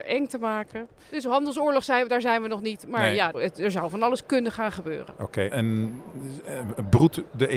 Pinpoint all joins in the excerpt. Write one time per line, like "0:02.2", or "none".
0:03.3
0:05.5